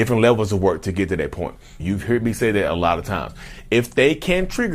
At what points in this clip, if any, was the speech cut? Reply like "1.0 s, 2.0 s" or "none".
1.8 s